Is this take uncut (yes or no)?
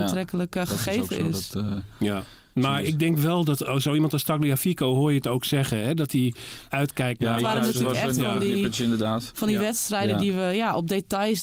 no